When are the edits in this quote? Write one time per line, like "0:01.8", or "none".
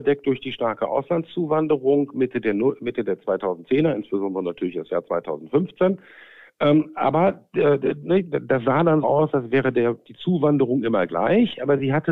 0:09.0